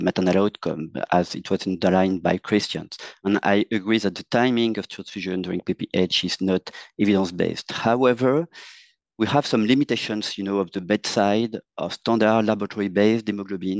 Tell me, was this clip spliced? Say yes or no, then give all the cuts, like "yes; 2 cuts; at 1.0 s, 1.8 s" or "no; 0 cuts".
no; 0 cuts